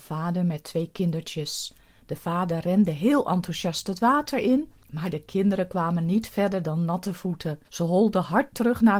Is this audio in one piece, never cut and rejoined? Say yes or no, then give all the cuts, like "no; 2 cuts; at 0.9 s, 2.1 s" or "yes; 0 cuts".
no; 1 cut; at 7.6 s